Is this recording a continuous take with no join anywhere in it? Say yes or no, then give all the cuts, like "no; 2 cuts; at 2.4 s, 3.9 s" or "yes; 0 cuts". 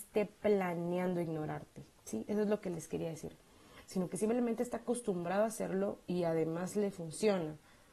yes; 0 cuts